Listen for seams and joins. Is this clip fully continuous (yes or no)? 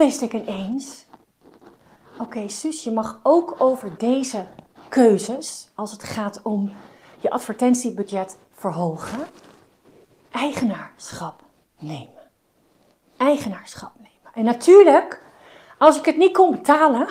yes